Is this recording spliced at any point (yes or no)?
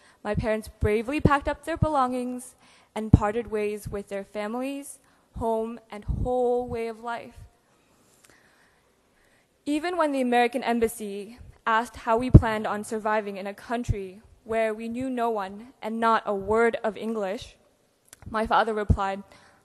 no